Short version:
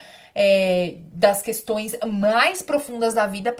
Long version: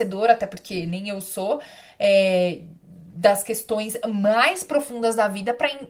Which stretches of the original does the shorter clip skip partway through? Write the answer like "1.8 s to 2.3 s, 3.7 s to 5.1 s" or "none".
2.7 s to 3.1 s